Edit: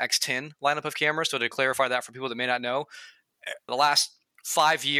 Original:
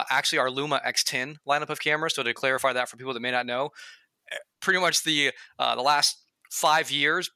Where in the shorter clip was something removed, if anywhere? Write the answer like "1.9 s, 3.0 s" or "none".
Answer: 3.7 s